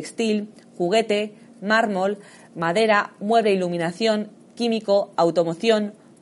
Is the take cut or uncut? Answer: uncut